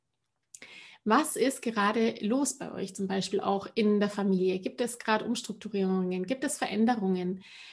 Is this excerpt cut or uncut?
uncut